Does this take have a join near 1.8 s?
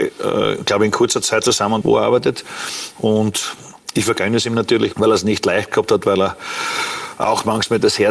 yes; 2 cuts; at 1.8 s, 4.9 s

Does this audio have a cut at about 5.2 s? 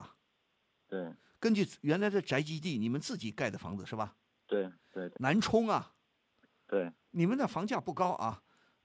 yes; 1 cut; at 5.2 s

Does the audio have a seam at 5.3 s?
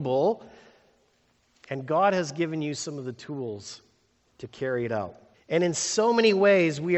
yes; 1 cut; at 5.3 s

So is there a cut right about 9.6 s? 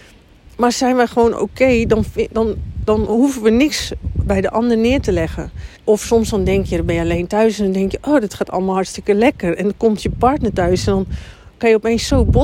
no; 1 cut; at 5.8 s

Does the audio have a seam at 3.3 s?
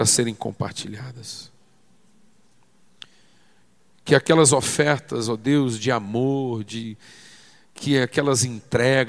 no; 0 cuts

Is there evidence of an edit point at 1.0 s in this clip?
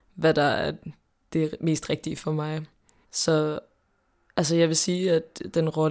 no; 1 cut; at 3.0 s

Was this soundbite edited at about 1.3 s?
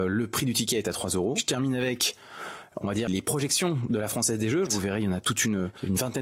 no; 2 cuts; at 3.1 s, 4.7 s

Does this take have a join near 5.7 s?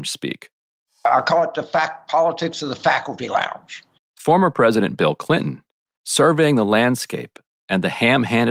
no; 1 cut; at 4.0 s

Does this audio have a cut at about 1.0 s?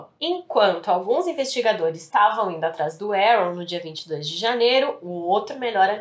no; 1 cut; at 5.0 s

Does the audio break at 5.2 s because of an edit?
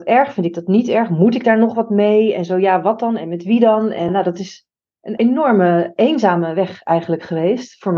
yes; 2 cuts; at 4.1 s, 5.2 s

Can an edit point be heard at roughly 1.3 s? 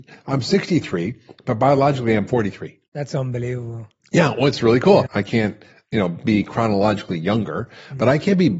no; 1 cut; at 5.1 s

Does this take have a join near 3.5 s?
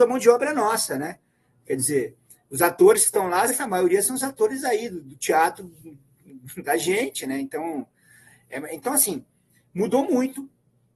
yes; 1 cut; at 3.5 s

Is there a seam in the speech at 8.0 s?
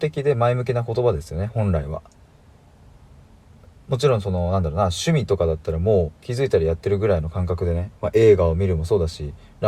yes; 2 cuts; at 6.2 s, 8.0 s

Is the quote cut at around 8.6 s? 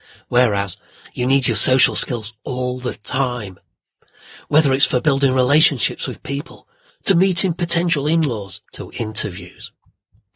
yes; 2 cuts; at 6.9 s, 8.6 s

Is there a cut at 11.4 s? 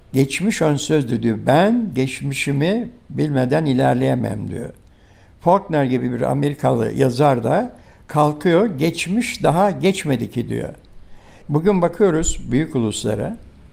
yes; 1 cut; at 11.4 s

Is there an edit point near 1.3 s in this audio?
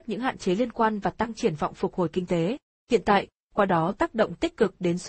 no; 1 cut; at 3.4 s

